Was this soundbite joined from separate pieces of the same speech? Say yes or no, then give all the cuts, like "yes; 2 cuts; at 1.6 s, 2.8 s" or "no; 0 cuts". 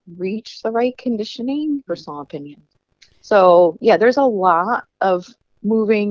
yes; 2 cuts; at 1.9 s, 4.9 s